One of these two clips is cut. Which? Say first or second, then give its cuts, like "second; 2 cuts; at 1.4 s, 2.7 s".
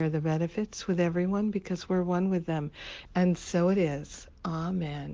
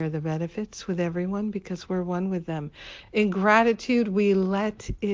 first; 1 cut; at 3.1 s